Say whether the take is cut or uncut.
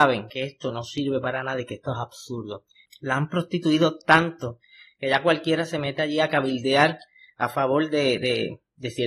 cut